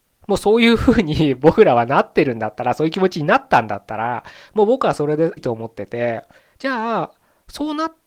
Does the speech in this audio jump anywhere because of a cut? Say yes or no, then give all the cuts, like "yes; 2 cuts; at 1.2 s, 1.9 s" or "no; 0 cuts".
yes; 1 cut; at 5.4 s